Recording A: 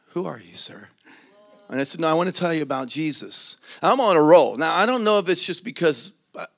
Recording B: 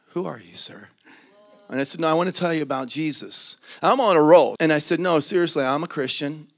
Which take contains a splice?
B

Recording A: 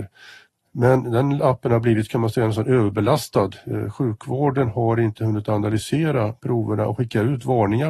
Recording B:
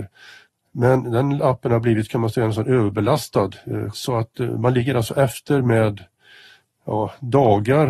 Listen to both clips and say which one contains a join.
B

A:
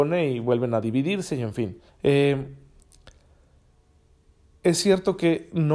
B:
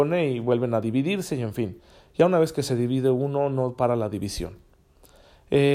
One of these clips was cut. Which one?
A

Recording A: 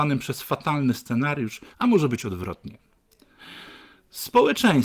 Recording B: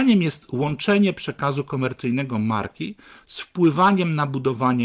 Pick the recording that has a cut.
A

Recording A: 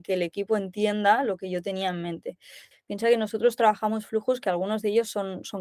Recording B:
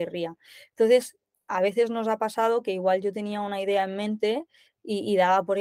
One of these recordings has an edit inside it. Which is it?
A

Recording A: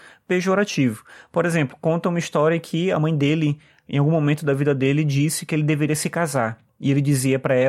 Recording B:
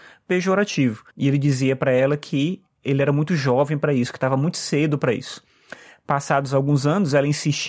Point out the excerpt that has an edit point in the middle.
B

